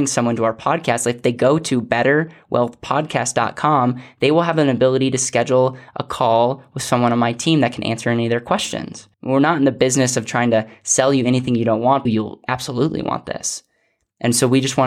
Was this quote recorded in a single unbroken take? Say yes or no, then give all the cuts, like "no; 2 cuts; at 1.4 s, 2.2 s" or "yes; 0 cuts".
no; 2 cuts; at 9.1 s, 12.1 s